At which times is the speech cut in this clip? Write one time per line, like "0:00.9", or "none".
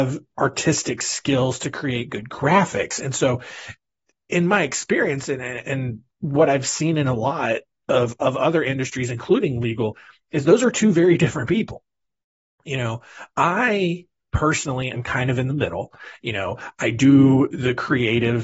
none

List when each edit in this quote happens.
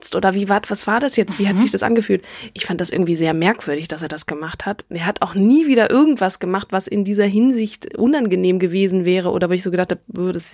0:07.9

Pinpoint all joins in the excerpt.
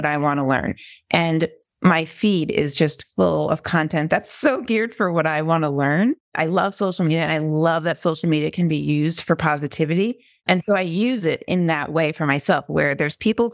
none

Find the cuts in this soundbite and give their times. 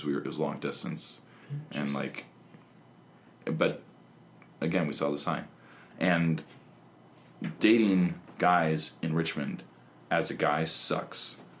0:05.9

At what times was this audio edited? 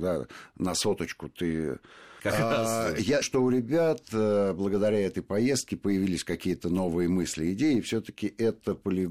0:02.2
0:03.2

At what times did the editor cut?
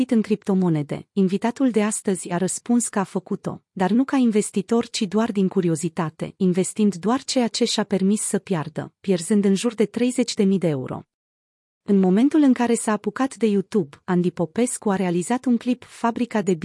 0:11.8

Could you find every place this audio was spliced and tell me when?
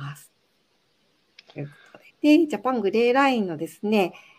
0:02.1

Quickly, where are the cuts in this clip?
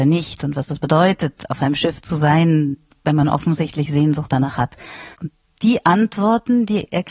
0:05.1

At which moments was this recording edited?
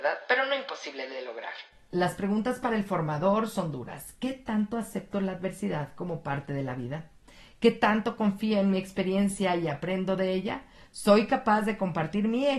none

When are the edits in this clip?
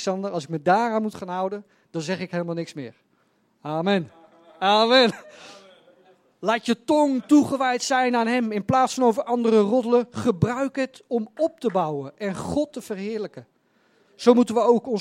none

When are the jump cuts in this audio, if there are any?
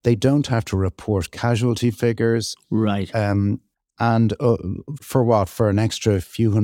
0:05.0

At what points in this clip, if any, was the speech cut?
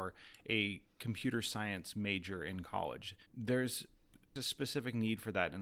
0:03.2

